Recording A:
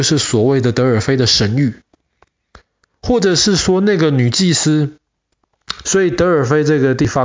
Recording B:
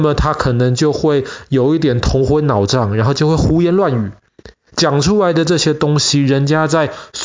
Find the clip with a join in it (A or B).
A